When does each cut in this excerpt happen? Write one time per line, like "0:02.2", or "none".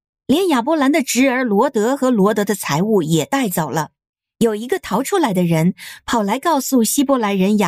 0:04.3